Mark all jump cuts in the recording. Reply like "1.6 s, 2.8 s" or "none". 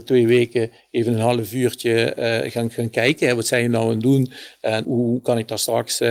4.8 s